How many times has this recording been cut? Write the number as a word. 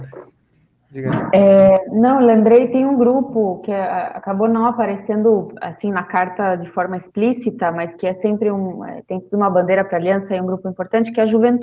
zero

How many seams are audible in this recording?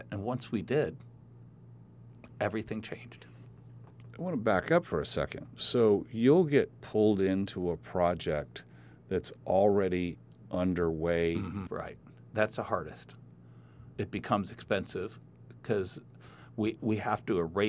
two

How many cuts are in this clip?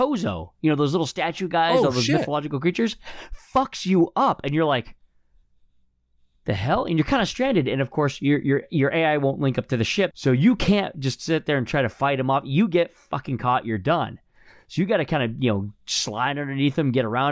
one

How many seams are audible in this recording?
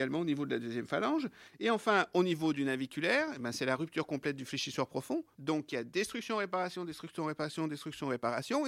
one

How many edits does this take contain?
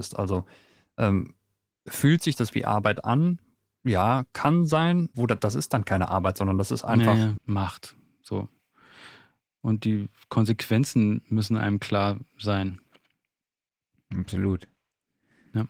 three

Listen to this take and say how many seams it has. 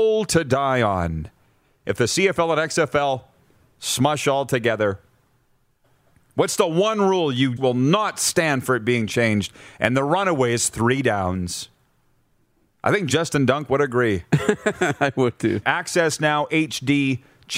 two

